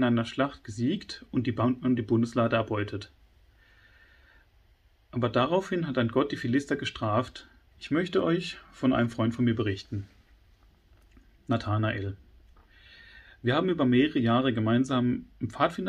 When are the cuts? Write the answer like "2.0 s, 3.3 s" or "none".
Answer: 7.7 s